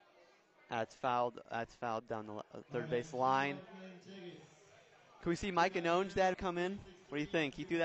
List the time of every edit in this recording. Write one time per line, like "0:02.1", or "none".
0:06.3